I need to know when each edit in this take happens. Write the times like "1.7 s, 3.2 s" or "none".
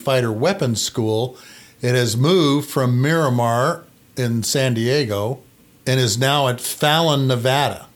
none